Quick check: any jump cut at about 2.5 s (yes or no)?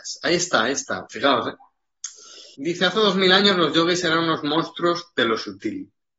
yes